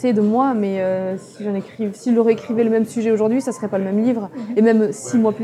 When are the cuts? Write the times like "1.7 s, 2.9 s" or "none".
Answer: none